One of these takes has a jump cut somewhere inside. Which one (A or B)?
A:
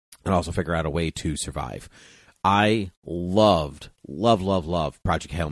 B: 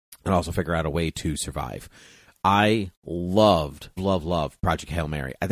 B